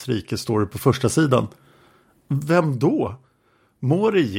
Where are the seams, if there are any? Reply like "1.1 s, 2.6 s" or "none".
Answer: none